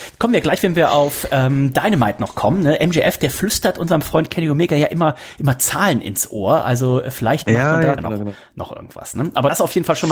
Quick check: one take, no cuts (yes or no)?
no